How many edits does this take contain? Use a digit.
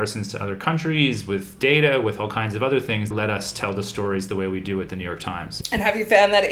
1